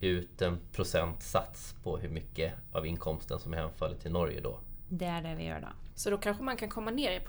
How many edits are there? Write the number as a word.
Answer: one